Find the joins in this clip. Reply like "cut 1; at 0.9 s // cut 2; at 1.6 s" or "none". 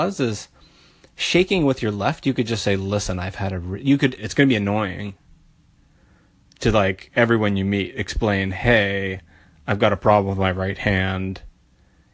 cut 1; at 4.2 s